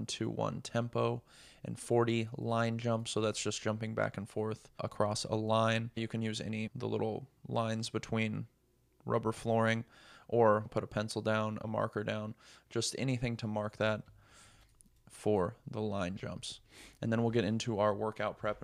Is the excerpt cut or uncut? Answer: uncut